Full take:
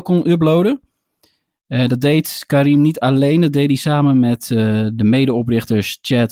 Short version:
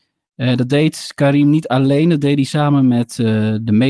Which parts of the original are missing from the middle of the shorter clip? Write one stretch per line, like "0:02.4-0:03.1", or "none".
none